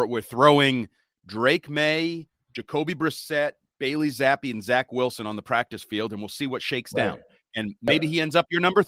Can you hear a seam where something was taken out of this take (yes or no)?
no